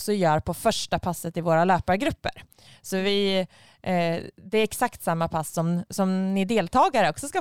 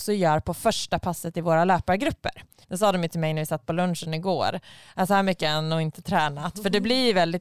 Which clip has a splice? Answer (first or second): second